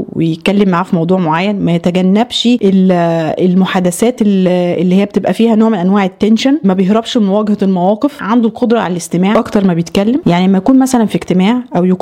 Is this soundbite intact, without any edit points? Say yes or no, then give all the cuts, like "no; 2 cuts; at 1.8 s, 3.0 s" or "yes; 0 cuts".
no; 1 cut; at 6.6 s